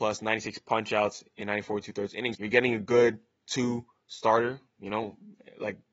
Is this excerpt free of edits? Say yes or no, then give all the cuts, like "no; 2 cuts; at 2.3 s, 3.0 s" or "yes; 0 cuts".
no; 1 cut; at 2.3 s